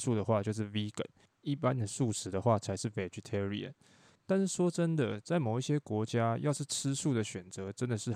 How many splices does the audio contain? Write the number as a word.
zero